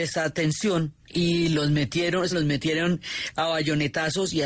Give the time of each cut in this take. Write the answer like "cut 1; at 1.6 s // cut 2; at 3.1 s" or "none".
cut 1; at 2.3 s